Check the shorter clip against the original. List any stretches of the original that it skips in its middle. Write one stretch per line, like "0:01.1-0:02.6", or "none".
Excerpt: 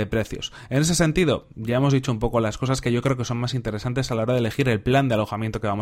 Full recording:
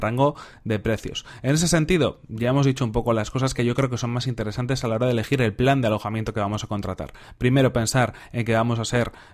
none